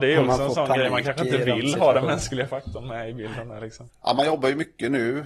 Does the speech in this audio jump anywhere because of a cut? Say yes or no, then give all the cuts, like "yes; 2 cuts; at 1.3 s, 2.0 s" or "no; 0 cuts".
no; 0 cuts